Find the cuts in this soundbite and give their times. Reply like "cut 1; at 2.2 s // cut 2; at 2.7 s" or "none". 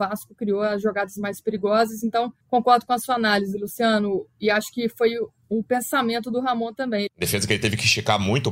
cut 1; at 2.4 s // cut 2; at 7.1 s